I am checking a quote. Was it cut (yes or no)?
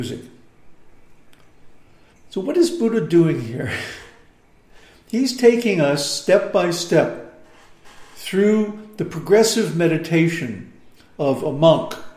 yes